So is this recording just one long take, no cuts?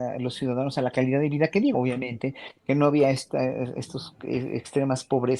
no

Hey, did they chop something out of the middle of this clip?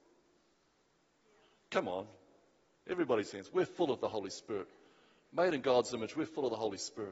no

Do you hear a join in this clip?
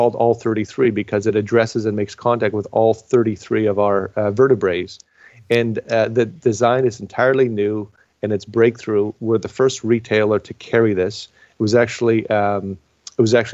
no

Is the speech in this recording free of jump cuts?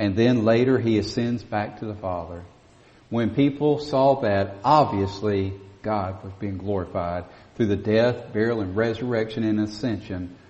yes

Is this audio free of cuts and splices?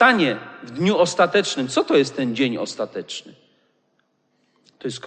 yes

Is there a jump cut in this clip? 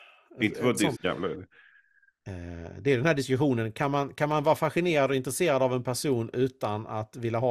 yes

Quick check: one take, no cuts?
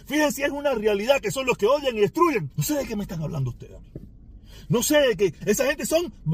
no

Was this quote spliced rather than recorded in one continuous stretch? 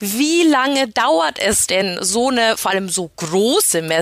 no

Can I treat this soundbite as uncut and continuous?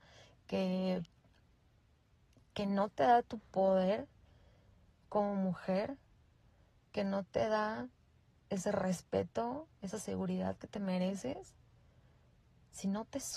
yes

